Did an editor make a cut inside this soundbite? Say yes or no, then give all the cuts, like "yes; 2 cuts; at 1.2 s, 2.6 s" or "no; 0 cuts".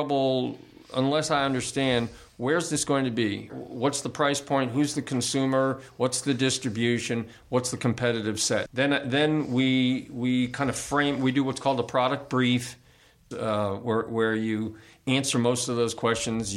yes; 3 cuts; at 3.5 s, 8.7 s, 13.3 s